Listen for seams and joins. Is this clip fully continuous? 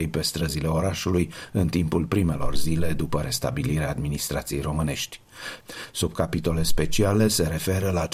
no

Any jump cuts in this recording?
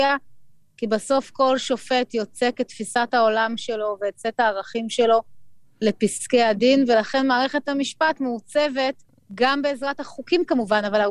no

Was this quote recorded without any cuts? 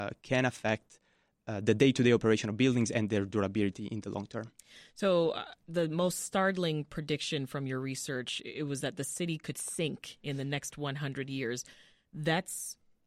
yes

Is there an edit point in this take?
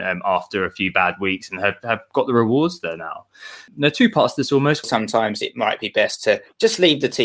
yes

